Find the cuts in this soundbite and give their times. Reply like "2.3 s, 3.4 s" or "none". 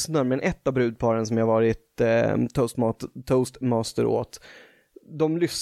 none